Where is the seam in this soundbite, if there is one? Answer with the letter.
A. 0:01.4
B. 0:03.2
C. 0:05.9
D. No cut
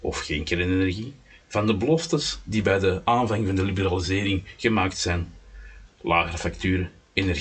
A